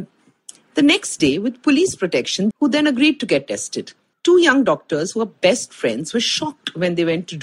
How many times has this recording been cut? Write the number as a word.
two